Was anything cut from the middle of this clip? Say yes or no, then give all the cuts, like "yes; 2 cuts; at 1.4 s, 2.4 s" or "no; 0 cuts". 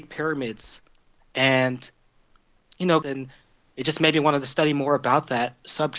yes; 1 cut; at 3.0 s